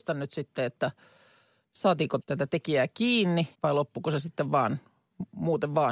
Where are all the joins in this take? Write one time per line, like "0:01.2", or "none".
0:02.2
0:03.5